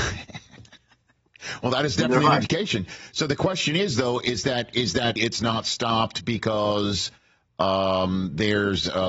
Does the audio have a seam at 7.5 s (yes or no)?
no